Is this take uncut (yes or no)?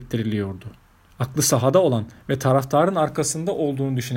no